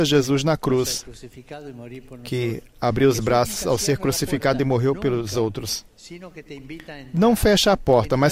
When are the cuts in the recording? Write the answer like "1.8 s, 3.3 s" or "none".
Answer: none